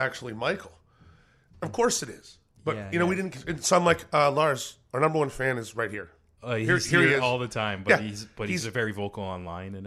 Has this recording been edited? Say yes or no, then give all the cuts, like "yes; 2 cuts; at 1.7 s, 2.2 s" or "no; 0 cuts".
no; 0 cuts